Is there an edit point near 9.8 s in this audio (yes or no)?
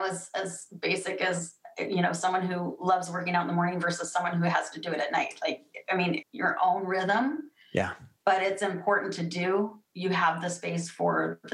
yes